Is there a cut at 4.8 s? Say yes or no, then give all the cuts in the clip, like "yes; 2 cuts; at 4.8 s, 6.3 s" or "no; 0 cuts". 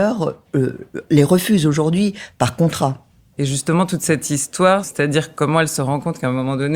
yes; 2 cuts; at 3.4 s, 4.8 s